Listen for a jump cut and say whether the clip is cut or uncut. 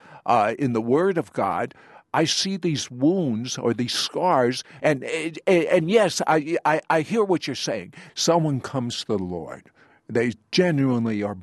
cut